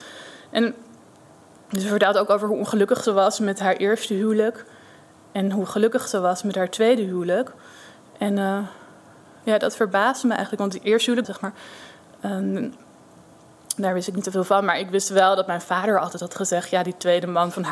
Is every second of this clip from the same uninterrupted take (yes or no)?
no